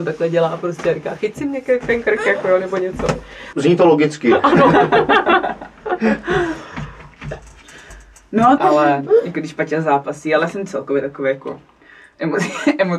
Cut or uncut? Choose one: cut